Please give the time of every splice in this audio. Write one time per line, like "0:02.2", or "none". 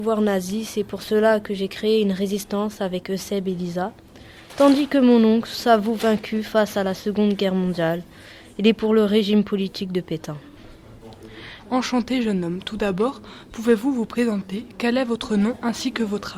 0:11.6